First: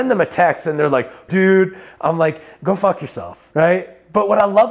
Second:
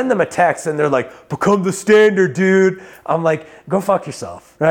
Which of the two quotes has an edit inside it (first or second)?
first